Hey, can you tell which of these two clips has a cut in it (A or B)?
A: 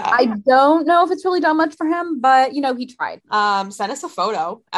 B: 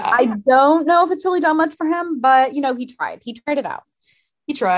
A